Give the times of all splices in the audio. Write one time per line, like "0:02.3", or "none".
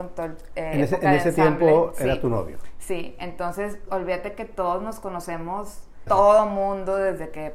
0:03.9
0:06.1